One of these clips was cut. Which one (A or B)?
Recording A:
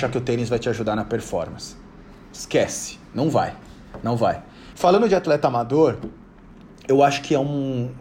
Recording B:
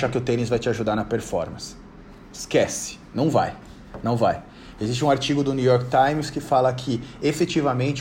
A